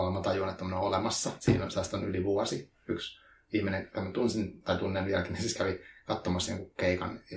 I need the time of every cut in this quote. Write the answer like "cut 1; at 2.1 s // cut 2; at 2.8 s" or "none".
none